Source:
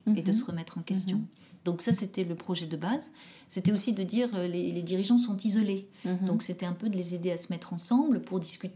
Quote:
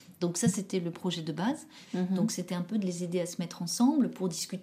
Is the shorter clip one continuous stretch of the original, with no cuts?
no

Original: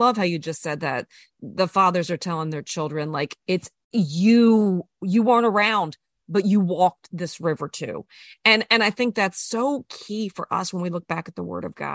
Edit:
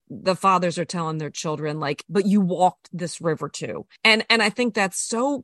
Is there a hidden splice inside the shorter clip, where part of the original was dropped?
yes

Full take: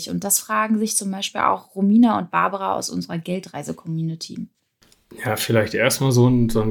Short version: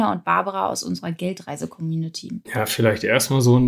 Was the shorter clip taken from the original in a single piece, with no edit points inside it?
no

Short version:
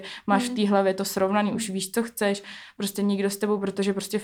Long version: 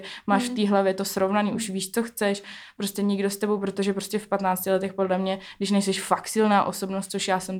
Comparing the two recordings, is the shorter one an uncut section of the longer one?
yes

